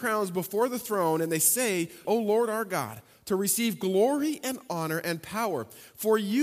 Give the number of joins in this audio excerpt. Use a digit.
1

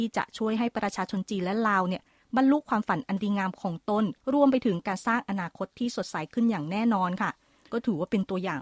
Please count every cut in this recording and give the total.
1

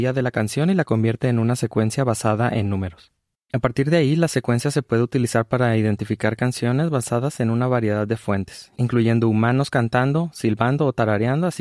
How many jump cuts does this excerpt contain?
0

